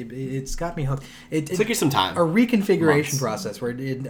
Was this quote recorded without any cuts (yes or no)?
no